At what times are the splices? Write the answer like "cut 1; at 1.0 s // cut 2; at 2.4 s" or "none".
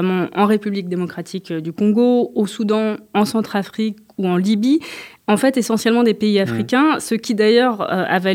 none